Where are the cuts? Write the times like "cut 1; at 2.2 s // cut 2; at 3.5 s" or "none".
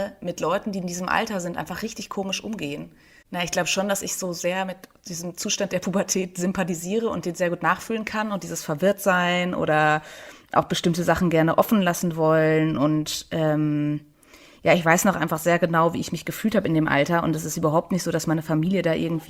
cut 1; at 3.2 s